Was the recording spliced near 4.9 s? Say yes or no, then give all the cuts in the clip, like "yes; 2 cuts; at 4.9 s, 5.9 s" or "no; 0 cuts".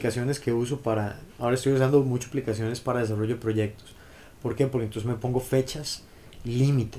no; 0 cuts